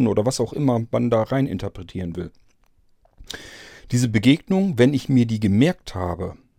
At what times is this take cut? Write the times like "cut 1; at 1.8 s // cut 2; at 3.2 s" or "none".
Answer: none